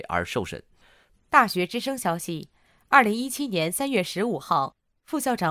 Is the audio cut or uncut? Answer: cut